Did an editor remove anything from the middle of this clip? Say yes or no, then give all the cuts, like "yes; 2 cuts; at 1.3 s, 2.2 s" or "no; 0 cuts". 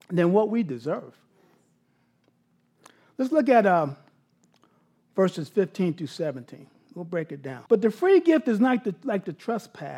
yes; 1 cut; at 7.7 s